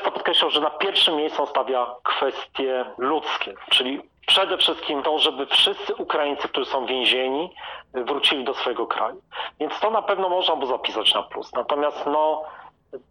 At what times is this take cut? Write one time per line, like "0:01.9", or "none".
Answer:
none